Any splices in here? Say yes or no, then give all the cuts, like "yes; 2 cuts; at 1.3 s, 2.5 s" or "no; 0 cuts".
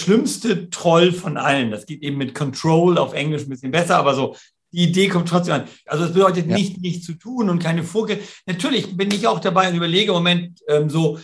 yes; 1 cut; at 5.9 s